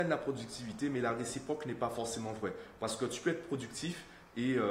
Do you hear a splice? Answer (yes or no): no